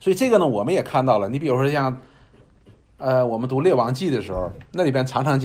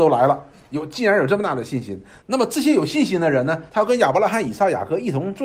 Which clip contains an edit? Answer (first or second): second